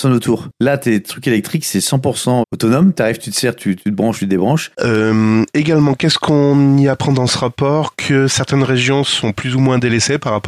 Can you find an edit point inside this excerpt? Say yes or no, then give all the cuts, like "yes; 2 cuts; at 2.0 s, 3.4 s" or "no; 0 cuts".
yes; 2 cuts; at 2.4 s, 4.7 s